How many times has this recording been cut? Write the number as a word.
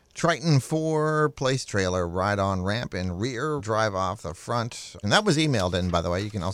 two